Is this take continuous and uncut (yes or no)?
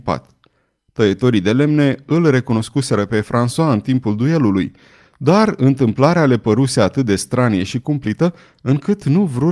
yes